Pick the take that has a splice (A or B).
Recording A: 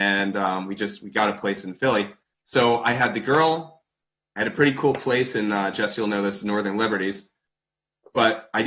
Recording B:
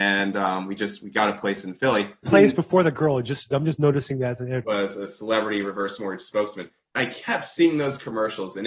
B